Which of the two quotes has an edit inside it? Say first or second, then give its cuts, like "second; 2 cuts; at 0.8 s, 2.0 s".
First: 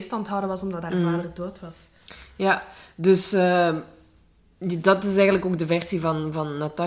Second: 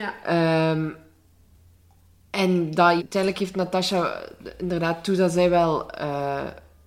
second; 1 cut; at 3.0 s